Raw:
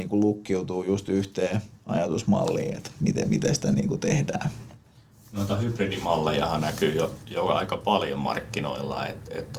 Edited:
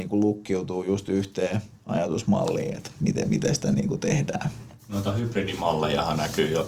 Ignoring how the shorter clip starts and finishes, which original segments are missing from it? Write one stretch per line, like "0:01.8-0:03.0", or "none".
0:04.8-0:05.2